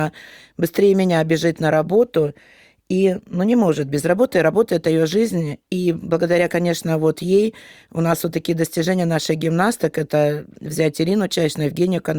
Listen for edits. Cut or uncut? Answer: uncut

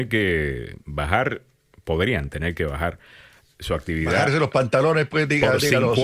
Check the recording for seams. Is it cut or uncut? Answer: uncut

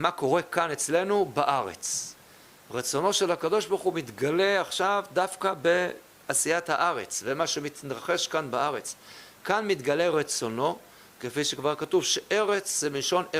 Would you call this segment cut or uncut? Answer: uncut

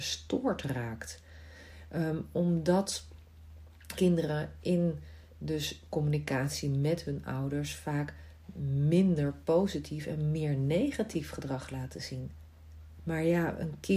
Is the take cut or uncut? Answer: cut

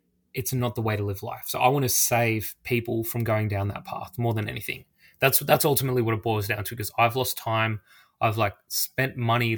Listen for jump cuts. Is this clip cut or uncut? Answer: uncut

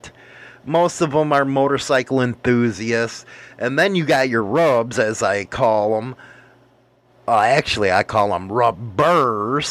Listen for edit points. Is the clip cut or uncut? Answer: uncut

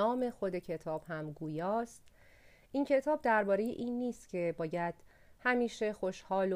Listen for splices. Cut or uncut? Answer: uncut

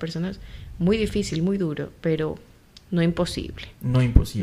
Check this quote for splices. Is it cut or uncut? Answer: uncut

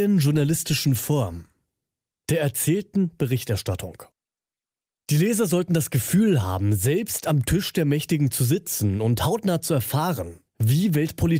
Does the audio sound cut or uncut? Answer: uncut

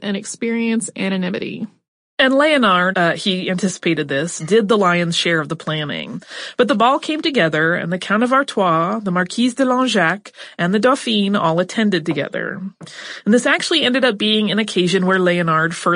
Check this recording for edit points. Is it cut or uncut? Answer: cut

